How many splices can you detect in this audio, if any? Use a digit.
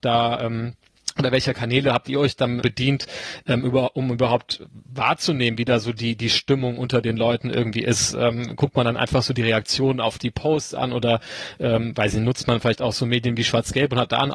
1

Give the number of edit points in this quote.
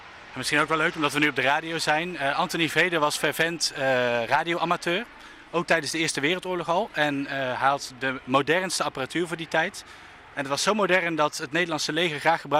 0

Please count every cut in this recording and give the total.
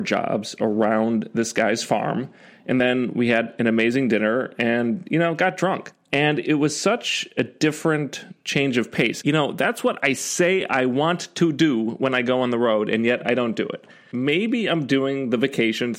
0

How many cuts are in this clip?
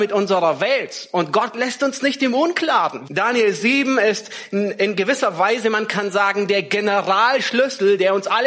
1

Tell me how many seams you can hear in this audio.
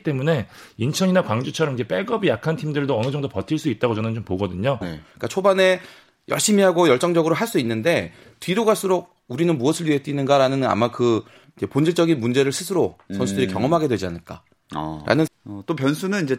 2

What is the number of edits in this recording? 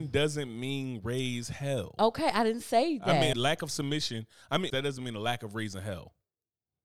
2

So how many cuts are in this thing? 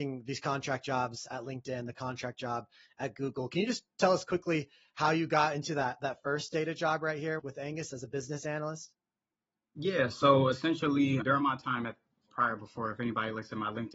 0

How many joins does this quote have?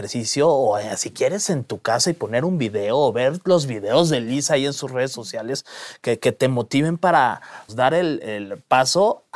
1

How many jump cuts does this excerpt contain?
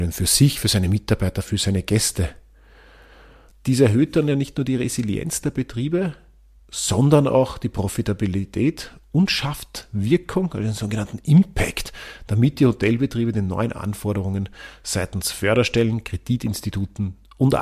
1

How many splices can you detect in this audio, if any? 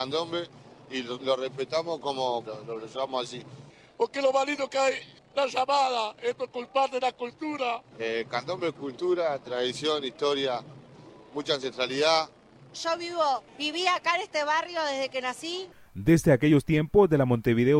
3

